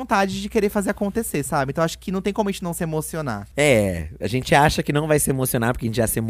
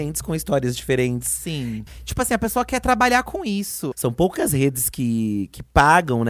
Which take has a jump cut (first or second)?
second